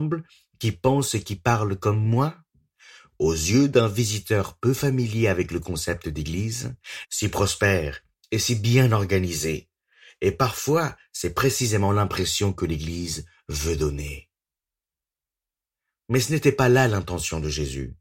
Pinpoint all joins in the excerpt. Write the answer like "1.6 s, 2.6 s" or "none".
7.0 s